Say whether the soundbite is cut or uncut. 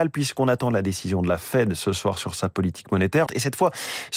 cut